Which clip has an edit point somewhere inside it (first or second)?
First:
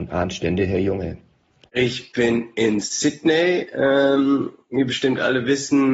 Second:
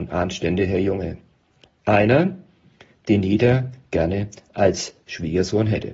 first